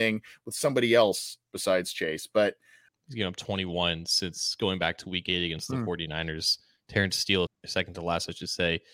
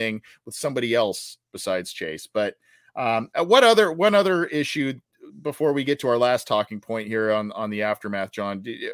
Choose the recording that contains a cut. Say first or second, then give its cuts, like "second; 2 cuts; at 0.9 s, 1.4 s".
first; 2 cuts; at 2.9 s, 7.5 s